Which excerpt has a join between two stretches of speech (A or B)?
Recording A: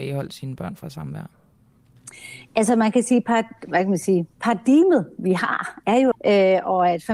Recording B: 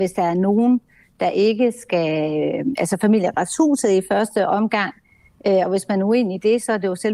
A